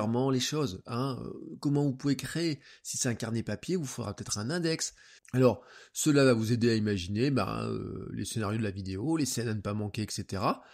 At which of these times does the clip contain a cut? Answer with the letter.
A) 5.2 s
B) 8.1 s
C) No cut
A